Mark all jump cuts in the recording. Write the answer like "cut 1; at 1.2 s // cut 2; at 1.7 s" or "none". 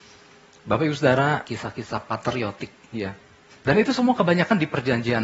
cut 1; at 1.4 s // cut 2; at 3.5 s